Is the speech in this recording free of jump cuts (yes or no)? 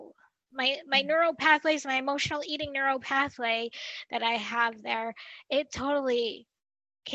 yes